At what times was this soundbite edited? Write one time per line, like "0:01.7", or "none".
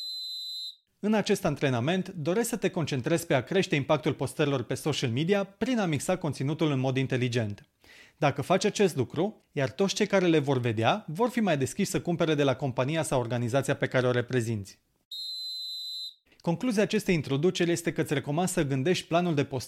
0:09.4
0:16.3